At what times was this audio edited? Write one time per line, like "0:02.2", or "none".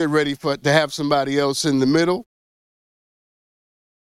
none